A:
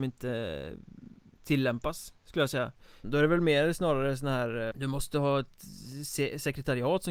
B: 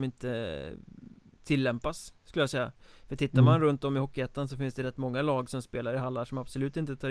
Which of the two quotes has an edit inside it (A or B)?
A